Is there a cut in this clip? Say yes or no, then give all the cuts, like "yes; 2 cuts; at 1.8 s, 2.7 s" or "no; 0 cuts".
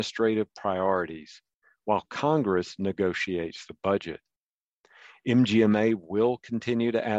no; 0 cuts